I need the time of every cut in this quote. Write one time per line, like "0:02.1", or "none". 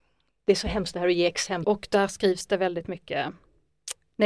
0:01.6